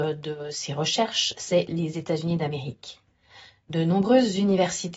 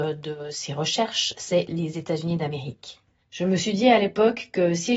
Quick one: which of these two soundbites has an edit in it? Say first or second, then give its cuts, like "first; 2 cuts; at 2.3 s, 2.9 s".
second; 1 cut; at 3.2 s